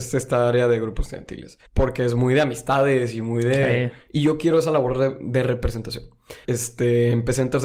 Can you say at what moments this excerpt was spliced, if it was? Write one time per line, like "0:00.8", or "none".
0:01.6
0:04.1
0:06.4